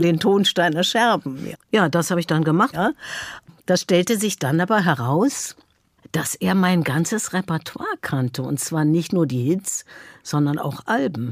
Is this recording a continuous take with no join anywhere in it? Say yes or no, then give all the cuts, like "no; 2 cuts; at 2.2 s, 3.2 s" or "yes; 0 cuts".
no; 2 cuts; at 1.5 s, 2.7 s